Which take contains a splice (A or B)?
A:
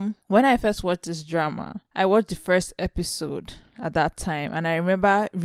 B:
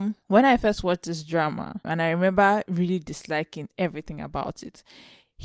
B